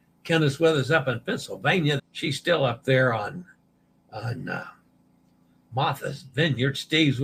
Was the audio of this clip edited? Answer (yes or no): yes